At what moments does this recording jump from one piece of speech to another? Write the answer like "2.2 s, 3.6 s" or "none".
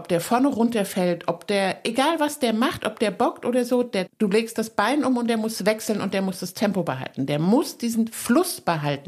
4.1 s